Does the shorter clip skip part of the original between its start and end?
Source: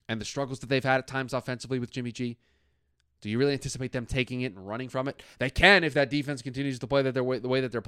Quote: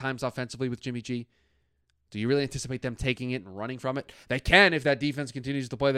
no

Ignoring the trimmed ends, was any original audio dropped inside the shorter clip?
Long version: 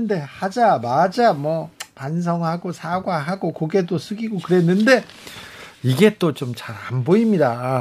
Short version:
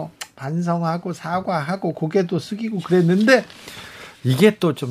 no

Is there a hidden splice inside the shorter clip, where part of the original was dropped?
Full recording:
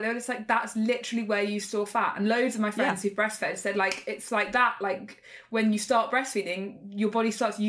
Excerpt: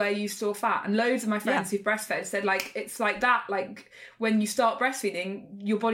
no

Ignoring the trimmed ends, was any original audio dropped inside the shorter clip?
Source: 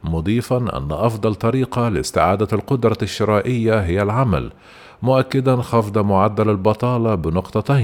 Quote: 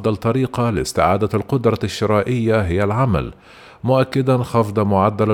no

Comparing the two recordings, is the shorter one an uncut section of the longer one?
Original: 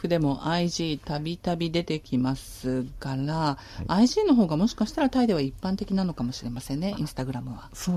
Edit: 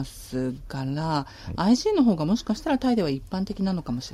yes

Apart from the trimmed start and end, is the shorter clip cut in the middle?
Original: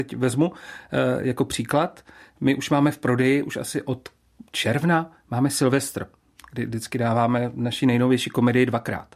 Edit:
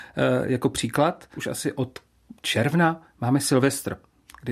yes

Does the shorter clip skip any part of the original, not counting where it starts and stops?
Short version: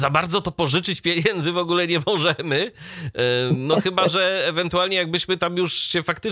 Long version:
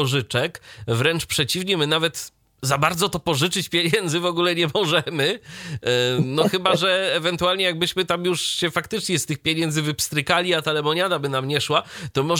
no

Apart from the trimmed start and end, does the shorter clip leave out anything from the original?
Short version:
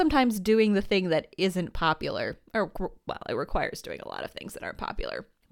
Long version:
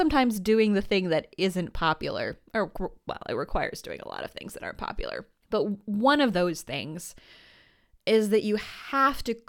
no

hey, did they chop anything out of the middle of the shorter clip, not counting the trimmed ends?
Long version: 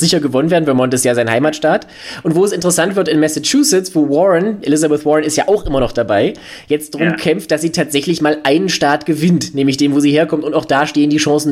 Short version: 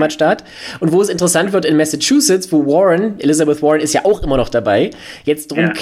no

